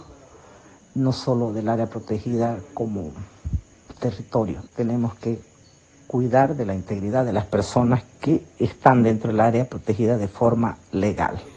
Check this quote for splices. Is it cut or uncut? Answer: cut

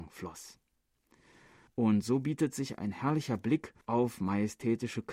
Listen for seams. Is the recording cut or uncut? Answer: cut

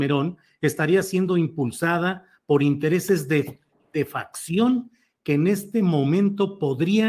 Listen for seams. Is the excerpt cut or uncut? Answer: uncut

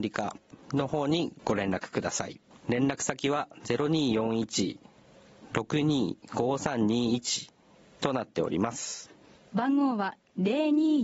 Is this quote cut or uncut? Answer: uncut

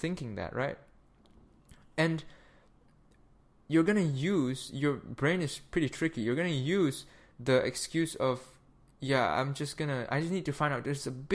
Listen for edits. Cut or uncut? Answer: uncut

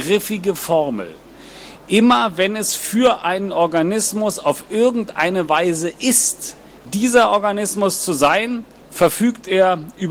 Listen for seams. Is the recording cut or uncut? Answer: uncut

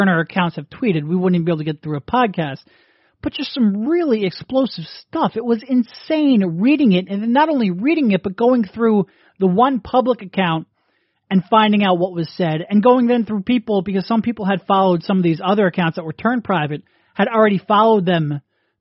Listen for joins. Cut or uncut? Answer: uncut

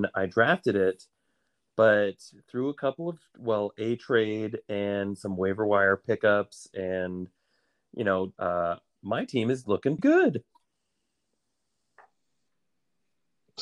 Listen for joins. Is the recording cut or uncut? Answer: cut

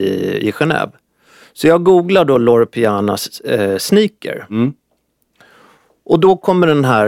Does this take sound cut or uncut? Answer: uncut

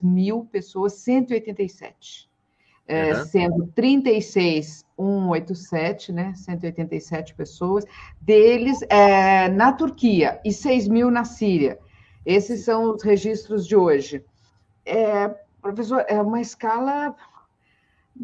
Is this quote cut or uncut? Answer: uncut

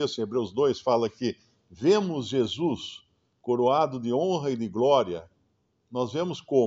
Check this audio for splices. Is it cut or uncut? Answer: uncut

